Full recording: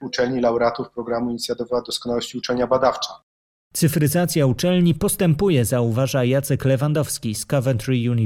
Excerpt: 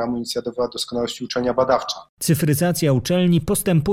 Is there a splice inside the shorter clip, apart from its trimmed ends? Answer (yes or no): yes